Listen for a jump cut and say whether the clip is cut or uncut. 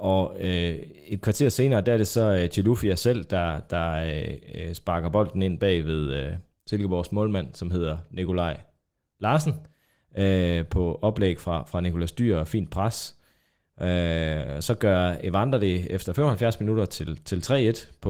uncut